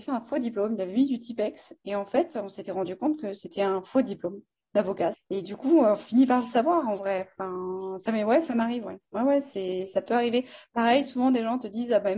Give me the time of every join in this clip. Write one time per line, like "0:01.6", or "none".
0:05.1

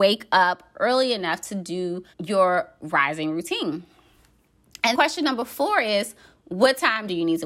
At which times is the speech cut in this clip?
0:02.1
0:04.9

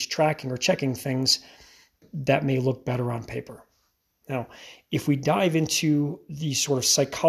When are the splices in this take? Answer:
none

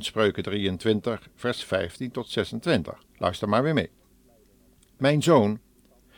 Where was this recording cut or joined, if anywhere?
0:03.1

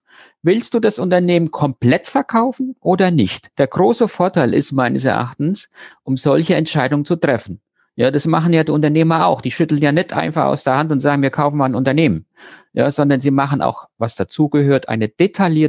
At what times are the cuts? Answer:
0:03.5
0:05.9

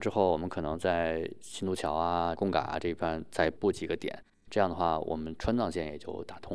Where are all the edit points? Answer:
none

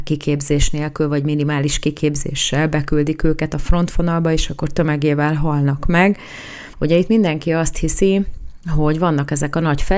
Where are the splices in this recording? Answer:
0:06.7

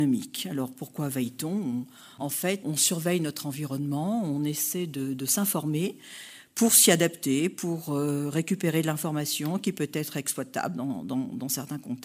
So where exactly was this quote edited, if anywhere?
0:02.6

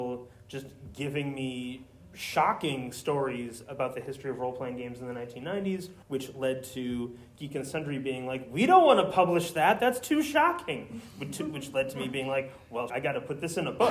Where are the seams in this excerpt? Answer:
0:06.0
0:12.9

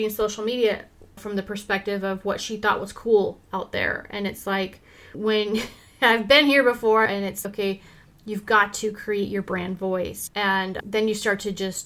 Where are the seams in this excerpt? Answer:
0:07.1

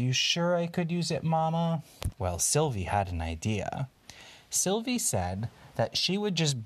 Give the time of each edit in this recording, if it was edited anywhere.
0:02.1

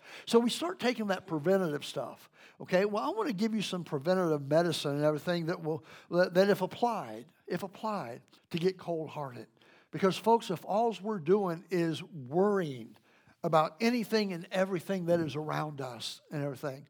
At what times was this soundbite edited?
0:08.4

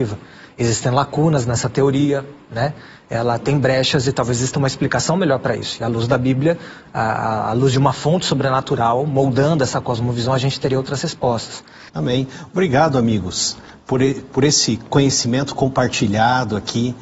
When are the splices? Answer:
none

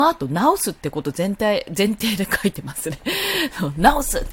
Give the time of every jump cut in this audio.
none

